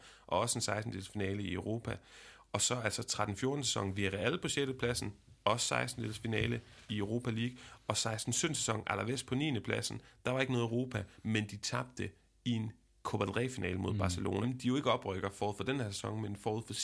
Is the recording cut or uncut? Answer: cut